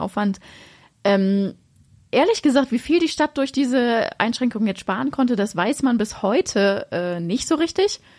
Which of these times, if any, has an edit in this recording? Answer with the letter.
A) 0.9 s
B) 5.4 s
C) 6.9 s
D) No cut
D